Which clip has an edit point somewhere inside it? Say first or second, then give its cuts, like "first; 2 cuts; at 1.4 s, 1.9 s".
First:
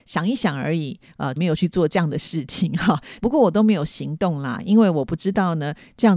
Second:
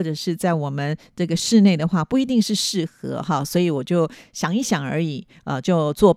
first; 2 cuts; at 1.4 s, 3.2 s